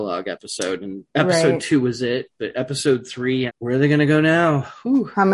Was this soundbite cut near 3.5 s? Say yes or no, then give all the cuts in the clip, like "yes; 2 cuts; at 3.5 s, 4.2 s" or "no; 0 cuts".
yes; 1 cut; at 3.5 s